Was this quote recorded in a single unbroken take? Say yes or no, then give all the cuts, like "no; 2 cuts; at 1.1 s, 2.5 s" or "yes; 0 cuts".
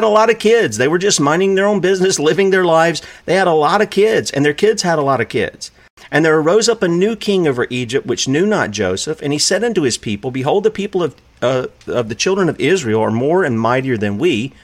yes; 0 cuts